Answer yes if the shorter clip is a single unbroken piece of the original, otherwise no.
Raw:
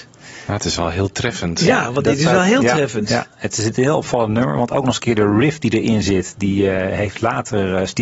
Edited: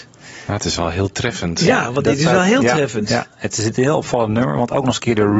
yes